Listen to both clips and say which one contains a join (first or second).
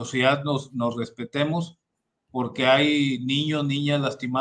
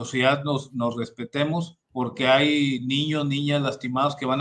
second